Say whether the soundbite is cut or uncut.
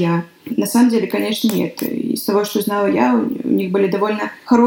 uncut